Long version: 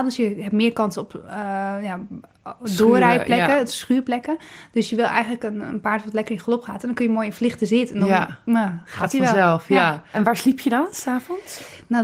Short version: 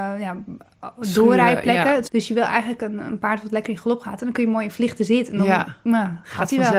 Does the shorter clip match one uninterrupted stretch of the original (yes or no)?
no